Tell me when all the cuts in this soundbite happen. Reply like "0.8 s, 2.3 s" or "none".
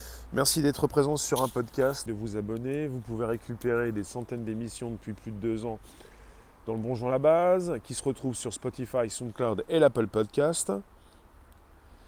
2.1 s